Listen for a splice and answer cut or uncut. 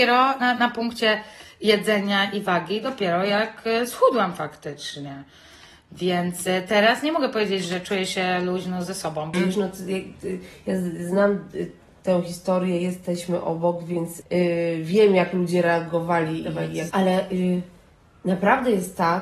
cut